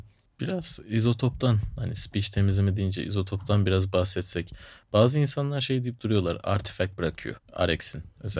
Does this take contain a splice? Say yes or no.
no